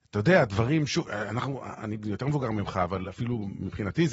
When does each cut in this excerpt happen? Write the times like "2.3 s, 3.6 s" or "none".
none